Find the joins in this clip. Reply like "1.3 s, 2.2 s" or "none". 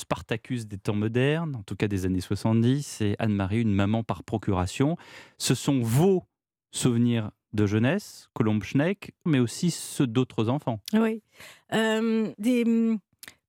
9.3 s, 10.8 s, 12.3 s